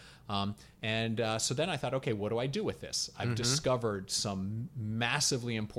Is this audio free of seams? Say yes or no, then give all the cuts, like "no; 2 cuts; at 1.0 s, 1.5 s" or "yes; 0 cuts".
yes; 0 cuts